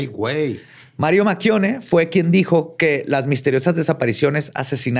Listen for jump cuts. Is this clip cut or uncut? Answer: uncut